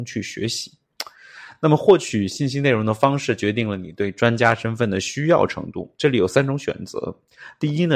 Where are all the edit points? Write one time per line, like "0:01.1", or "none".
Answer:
none